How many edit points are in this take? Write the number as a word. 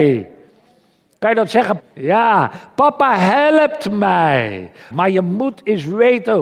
two